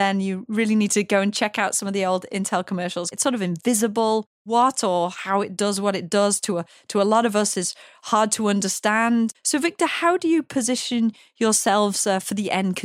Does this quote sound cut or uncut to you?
cut